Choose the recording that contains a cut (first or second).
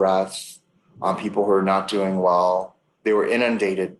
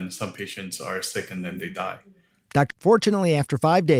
second